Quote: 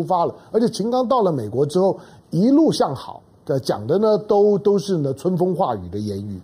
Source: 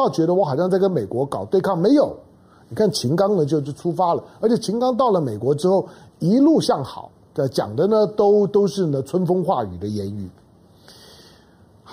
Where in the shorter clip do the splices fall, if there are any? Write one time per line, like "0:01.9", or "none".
none